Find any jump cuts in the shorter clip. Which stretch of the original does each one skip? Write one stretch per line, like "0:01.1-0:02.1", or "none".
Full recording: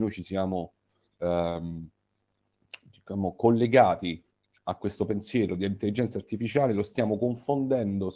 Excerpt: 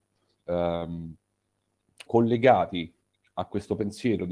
0:02.8-0:03.4